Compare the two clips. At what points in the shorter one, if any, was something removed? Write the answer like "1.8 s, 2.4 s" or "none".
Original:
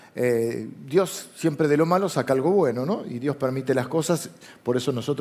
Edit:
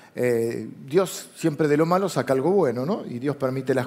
none